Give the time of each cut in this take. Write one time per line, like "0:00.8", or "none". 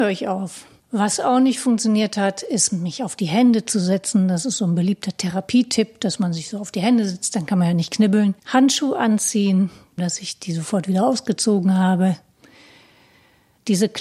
0:08.4
0:10.0